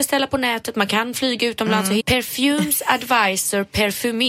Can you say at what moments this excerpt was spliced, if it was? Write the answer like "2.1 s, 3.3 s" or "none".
2.0 s